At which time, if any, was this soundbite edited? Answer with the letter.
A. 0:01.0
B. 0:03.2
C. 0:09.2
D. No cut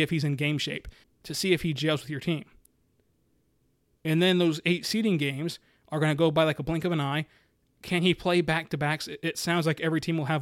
A